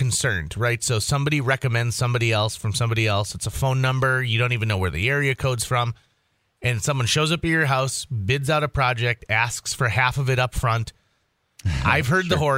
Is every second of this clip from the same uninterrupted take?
yes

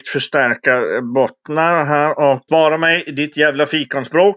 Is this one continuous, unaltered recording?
no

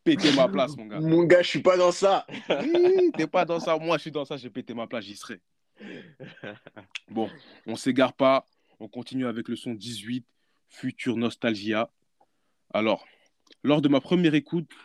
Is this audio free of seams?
yes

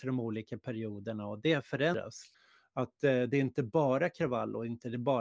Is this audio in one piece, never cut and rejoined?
yes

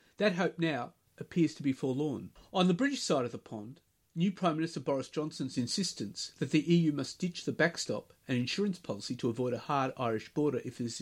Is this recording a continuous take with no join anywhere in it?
yes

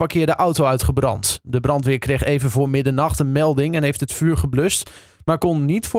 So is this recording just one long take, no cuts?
yes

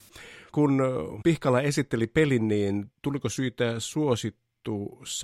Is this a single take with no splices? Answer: yes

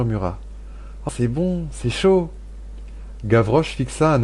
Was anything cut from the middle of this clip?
yes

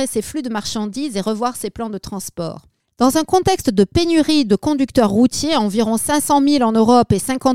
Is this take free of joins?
no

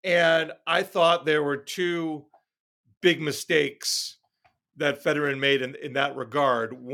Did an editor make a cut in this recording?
no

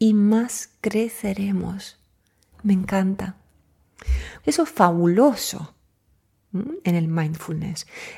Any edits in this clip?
yes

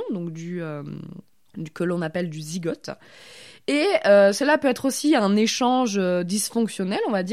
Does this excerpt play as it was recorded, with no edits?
yes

